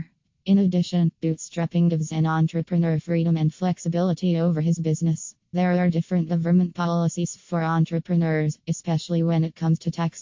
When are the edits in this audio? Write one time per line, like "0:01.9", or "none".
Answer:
0:05.5